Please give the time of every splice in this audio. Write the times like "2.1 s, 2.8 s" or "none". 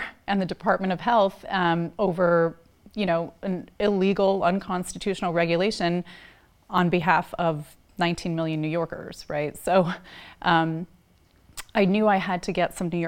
none